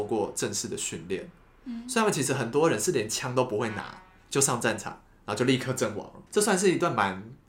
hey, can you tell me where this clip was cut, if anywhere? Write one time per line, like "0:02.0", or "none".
0:06.3